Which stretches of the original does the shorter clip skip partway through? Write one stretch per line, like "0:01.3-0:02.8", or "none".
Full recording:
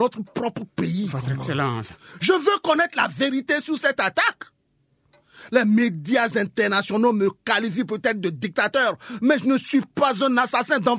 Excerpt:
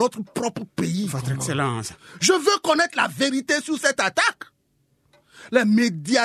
none

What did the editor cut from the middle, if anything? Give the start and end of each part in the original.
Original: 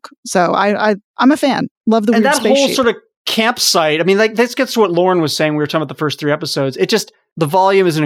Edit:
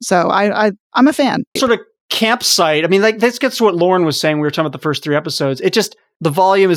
0:01.8-0:02.7

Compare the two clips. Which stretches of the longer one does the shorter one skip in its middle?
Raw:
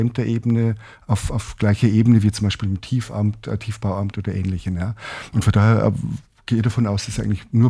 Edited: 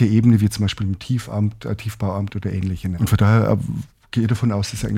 0:04.8-0:05.3

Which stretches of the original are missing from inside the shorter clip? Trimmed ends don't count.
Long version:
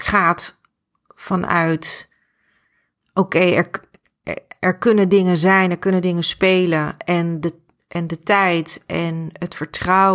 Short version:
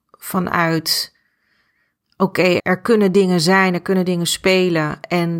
0:03.5-0:04.6

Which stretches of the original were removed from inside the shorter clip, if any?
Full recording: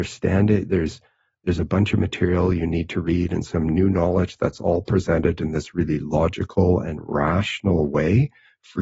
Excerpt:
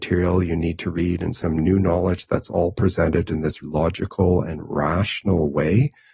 0:05.7-0:06.0

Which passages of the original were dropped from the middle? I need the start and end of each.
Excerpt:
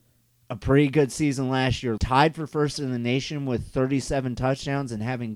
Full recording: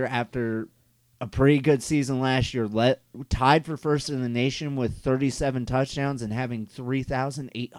0:02.7-0:03.3

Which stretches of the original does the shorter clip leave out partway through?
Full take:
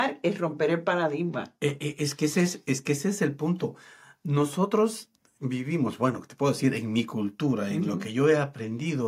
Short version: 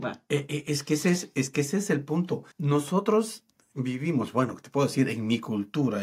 0:03.8-0:04.2

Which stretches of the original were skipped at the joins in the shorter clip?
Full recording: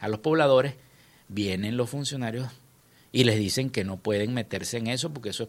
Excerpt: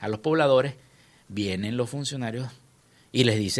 none

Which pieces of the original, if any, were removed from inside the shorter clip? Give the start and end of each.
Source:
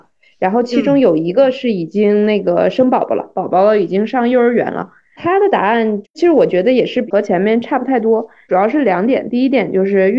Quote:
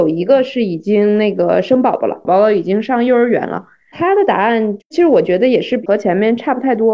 0:03.3-0:03.5

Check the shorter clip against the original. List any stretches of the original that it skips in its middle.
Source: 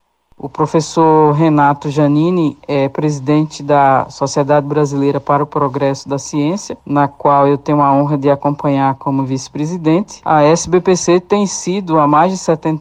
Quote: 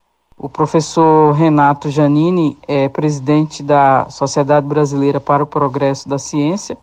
none

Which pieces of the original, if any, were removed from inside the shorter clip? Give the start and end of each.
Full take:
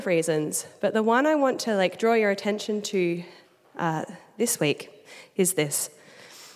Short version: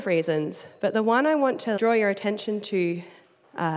0:01.8-0:02.0

